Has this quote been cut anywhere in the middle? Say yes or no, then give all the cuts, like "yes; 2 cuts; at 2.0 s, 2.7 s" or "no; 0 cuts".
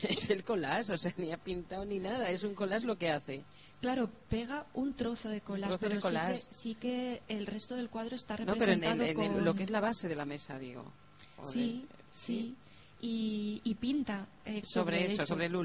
yes; 1 cut; at 14.6 s